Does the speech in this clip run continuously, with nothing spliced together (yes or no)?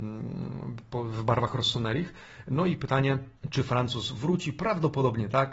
no